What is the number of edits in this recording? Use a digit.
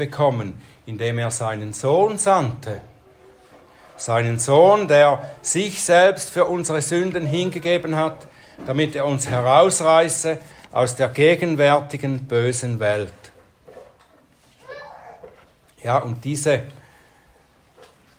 0